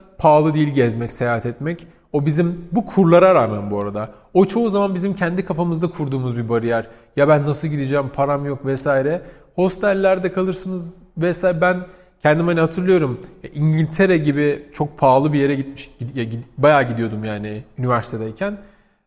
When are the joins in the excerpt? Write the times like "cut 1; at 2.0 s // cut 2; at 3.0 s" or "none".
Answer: none